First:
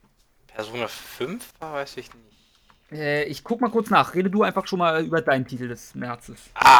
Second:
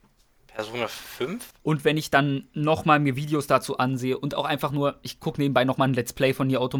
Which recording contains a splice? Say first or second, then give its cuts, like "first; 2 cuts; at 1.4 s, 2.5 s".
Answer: second; 1 cut; at 1.6 s